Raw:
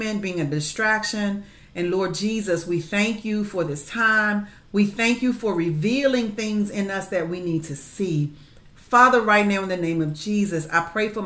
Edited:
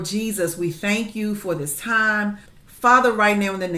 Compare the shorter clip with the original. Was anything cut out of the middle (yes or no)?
yes